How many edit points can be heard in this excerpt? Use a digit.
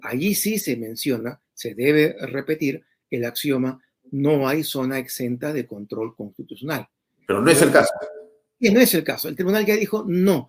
0